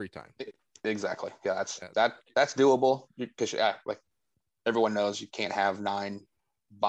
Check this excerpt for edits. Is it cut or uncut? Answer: uncut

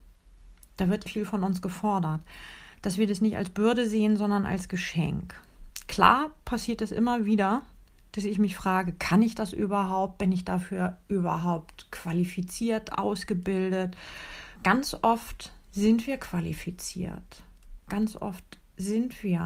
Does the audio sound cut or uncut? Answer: cut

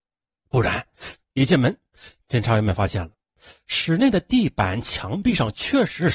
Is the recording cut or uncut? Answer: cut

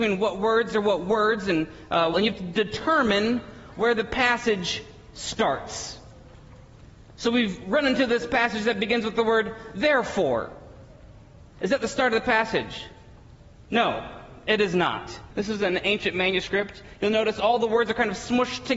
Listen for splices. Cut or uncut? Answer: cut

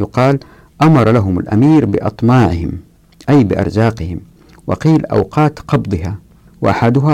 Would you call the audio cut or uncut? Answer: uncut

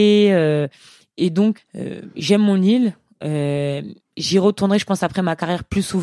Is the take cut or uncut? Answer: cut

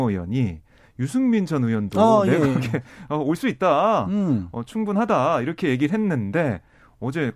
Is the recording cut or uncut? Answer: uncut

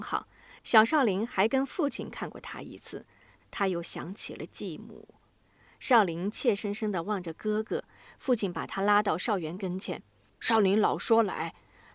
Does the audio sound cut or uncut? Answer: cut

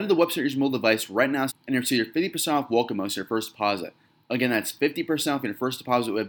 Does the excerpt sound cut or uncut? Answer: cut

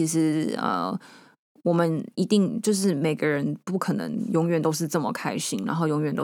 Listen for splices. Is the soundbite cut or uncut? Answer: uncut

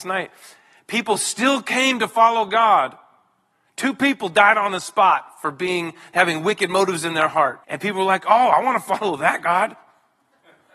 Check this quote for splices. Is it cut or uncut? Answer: cut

